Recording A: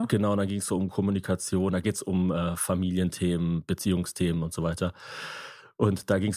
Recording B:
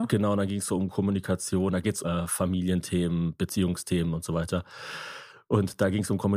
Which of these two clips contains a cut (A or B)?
B